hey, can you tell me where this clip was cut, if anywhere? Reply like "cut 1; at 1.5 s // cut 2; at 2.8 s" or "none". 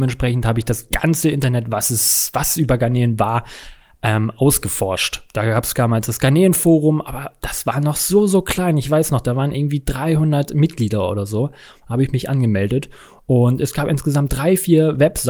none